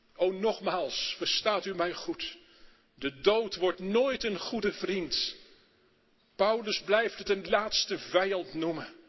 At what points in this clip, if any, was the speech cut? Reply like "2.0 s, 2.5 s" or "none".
none